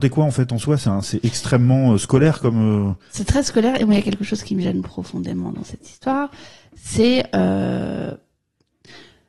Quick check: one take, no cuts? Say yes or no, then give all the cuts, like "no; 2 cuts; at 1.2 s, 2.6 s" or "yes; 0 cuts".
yes; 0 cuts